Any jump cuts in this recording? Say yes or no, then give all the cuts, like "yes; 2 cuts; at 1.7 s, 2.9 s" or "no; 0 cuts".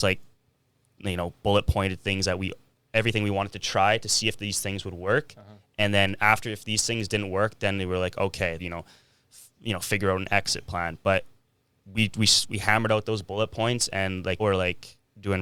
yes; 2 cuts; at 8.6 s, 14.4 s